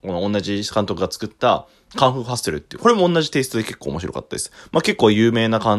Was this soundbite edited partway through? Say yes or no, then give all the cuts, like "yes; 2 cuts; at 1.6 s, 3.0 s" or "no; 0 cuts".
yes; 1 cut; at 4.7 s